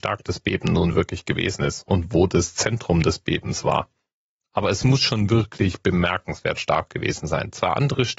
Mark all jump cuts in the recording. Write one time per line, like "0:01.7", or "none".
none